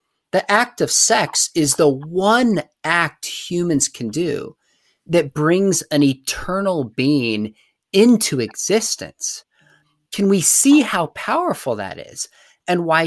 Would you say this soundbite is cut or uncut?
uncut